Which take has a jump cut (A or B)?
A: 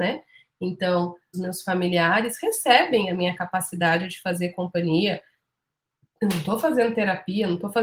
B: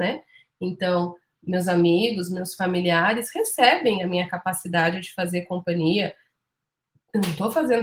A